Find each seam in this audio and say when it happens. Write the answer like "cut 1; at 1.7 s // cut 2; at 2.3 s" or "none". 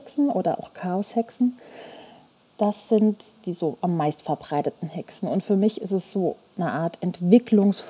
none